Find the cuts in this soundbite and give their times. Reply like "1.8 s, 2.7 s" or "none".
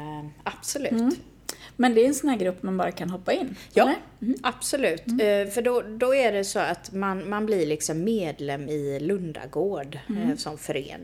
none